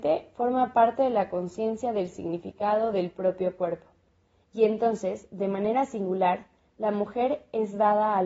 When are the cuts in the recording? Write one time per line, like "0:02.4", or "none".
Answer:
0:04.4